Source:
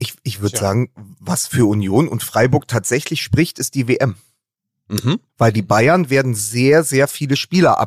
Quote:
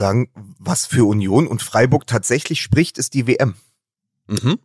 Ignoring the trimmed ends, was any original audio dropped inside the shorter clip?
no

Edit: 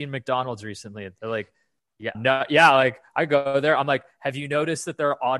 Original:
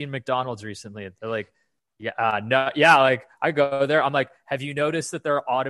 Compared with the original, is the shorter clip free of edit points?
no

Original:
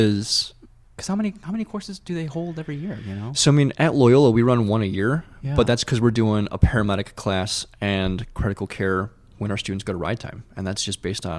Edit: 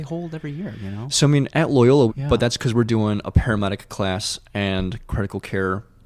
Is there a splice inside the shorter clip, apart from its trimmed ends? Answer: yes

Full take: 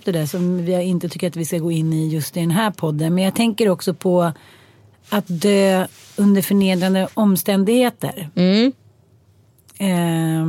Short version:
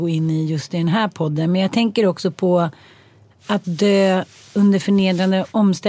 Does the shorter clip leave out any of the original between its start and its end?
no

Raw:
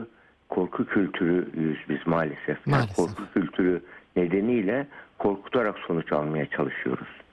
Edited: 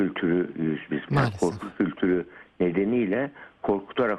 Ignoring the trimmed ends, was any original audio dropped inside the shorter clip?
yes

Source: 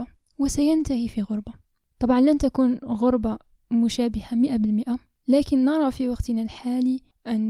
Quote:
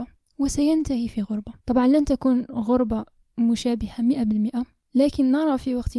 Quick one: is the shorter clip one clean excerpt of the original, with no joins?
no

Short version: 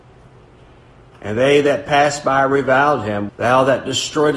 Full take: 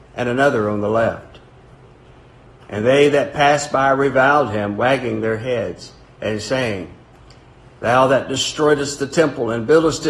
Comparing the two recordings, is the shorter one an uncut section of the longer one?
no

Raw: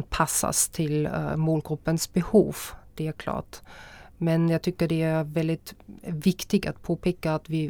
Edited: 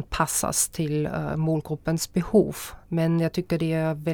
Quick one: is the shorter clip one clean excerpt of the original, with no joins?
no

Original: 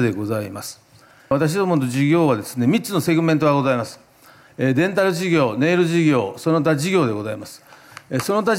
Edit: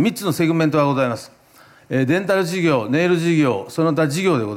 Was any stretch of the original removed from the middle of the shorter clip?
no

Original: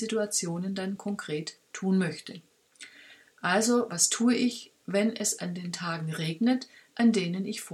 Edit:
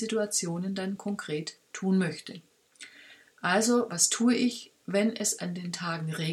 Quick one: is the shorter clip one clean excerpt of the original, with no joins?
yes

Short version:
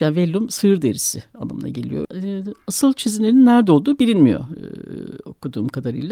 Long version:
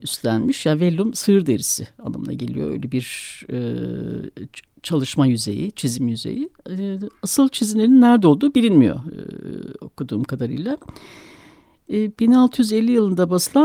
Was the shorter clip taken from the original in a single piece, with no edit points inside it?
no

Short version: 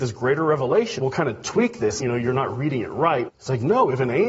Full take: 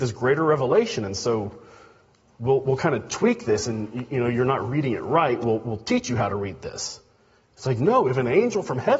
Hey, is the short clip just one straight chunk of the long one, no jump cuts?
no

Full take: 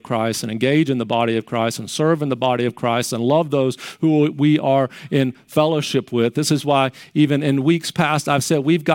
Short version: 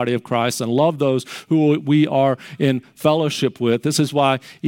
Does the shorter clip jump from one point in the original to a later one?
no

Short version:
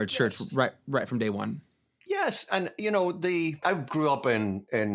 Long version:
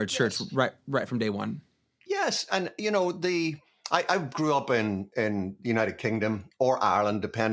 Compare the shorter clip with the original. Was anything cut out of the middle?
yes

